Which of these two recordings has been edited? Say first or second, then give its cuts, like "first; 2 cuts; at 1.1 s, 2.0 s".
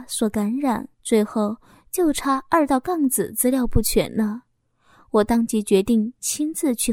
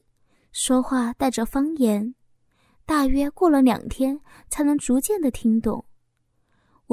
first; 1 cut; at 0.9 s